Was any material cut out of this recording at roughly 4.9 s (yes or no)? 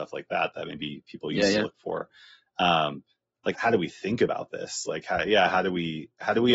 no